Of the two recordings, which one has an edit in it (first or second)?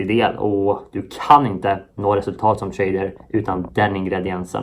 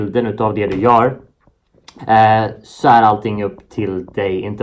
second